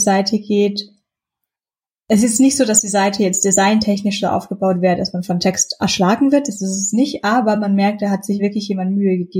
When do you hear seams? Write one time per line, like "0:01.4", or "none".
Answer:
none